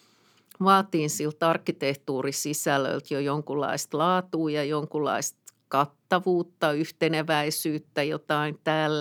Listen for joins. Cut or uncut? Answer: uncut